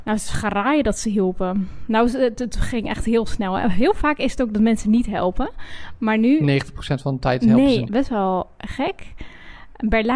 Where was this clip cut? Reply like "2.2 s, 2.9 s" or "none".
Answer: 7.8 s